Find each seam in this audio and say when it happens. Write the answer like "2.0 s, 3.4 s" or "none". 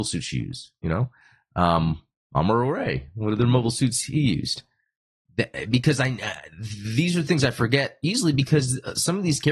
none